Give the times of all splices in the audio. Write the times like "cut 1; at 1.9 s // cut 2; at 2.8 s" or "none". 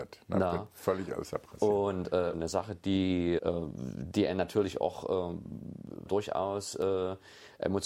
cut 1; at 2.3 s // cut 2; at 3.4 s // cut 3; at 6.1 s